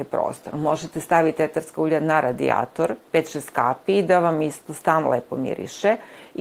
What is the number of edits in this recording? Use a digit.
1